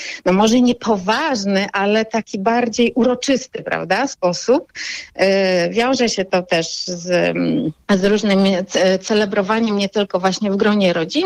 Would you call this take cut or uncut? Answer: uncut